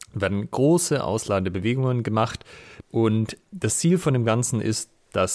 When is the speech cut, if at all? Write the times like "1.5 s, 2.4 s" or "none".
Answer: 2.8 s